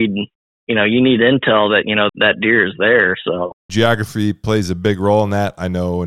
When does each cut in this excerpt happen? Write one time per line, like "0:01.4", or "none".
0:02.1
0:03.7